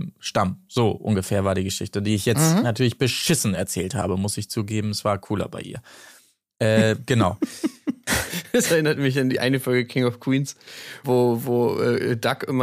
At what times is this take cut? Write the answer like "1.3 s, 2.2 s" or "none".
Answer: 11.0 s